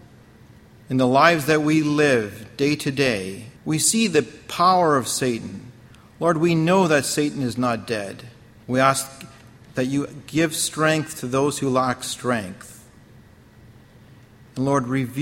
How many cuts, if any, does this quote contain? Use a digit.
2